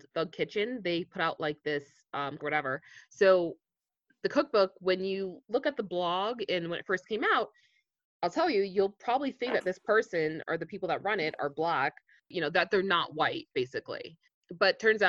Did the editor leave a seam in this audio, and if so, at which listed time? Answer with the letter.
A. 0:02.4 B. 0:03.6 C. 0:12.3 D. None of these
A